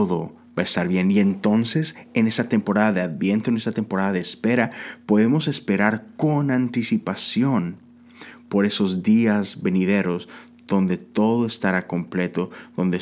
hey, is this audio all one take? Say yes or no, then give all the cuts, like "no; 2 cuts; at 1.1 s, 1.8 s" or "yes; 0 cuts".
yes; 0 cuts